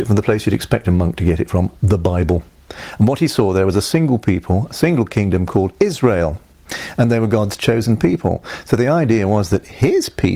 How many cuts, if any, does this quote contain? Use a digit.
1